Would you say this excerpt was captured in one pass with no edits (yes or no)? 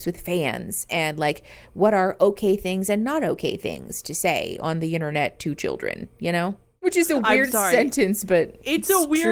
yes